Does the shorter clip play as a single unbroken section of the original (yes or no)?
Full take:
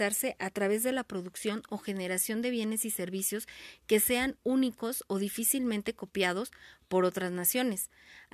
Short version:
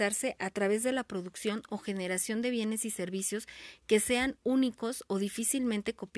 yes